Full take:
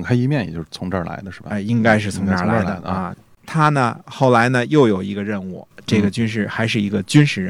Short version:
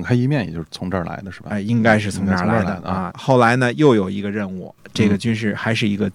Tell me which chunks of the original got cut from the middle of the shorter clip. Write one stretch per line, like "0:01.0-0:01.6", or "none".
0:03.1-0:04.0